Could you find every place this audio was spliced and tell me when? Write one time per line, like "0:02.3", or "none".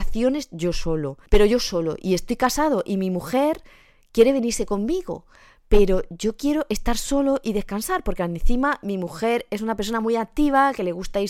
0:01.3